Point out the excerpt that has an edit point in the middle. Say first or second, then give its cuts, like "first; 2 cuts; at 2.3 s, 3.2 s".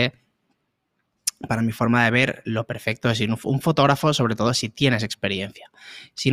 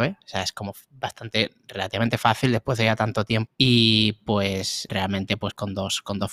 second; 2 cuts; at 3.5 s, 4.9 s